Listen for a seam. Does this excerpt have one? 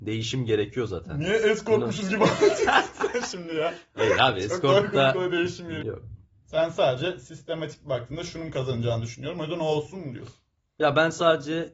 yes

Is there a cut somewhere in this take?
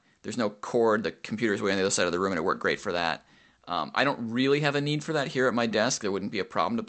no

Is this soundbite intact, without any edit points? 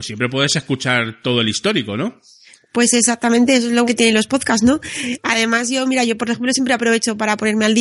no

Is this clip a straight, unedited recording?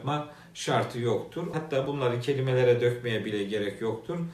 no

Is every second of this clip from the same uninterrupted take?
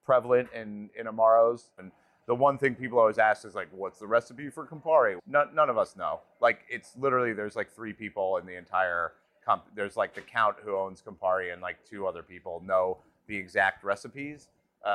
no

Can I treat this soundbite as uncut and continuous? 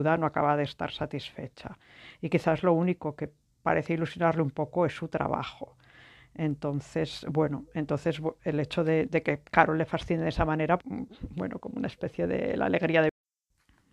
no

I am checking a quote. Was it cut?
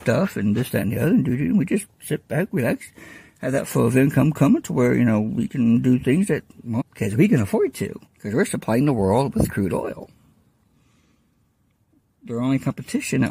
yes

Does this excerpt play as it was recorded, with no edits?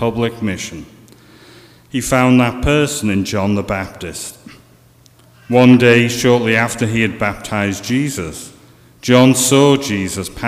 yes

